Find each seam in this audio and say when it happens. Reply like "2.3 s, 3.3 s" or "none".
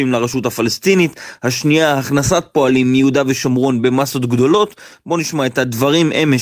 none